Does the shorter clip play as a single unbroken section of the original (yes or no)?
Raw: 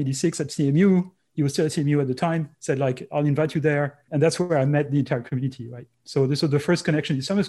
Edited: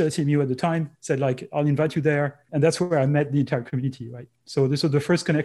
yes